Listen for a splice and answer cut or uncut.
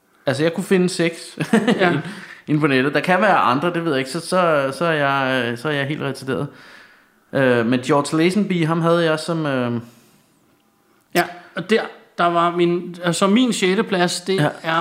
uncut